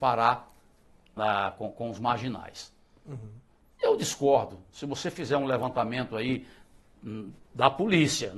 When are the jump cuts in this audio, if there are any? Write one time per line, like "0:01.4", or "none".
0:01.2